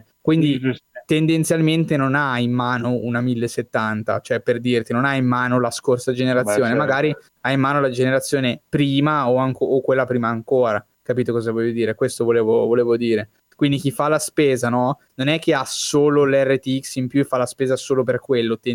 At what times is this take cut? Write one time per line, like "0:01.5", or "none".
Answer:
none